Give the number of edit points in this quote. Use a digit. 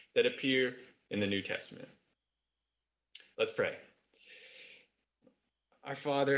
1